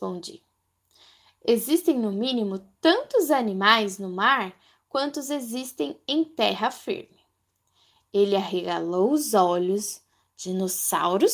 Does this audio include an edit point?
no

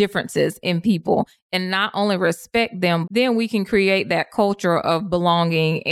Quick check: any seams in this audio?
yes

